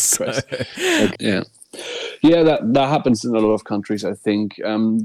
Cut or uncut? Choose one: cut